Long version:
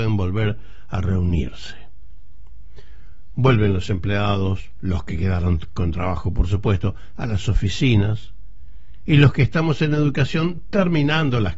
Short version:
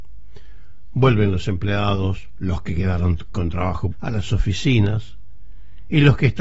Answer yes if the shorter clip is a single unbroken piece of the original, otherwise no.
no